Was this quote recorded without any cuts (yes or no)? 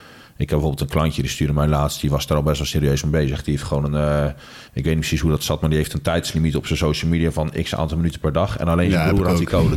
yes